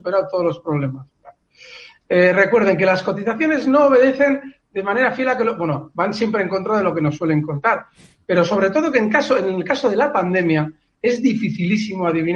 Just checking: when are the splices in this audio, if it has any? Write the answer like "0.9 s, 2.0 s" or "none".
5.9 s